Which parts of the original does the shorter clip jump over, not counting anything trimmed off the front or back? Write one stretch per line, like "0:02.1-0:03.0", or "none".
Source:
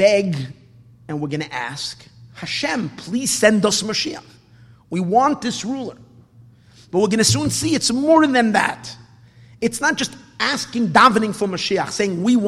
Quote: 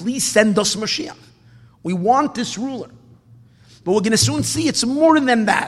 none